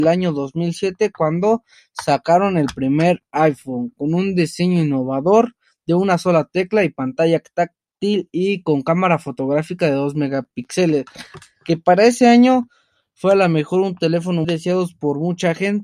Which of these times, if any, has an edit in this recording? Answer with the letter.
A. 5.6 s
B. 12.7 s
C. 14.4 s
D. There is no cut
C